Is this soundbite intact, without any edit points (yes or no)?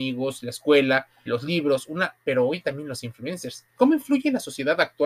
no